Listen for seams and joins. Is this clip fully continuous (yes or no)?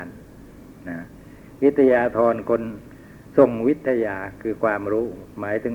yes